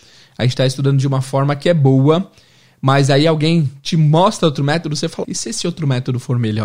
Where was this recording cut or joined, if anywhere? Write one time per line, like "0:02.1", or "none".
0:05.2